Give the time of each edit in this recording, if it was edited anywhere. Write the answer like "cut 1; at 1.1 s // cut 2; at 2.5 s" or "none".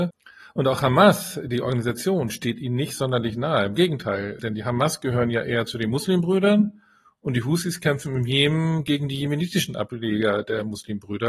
none